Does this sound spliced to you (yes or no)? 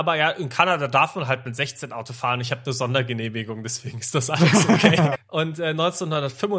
yes